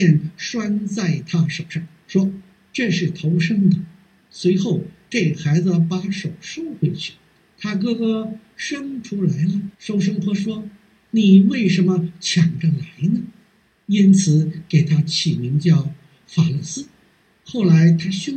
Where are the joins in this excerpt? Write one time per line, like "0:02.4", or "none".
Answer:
0:09.7